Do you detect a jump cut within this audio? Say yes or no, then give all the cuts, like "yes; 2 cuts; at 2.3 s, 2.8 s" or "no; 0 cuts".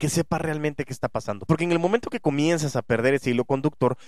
yes; 1 cut; at 1.5 s